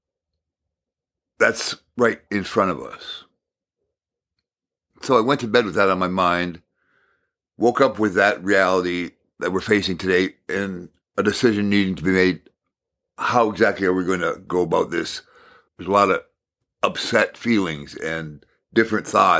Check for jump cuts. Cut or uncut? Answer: cut